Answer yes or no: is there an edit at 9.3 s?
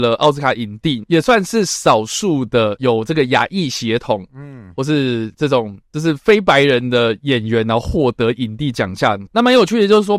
no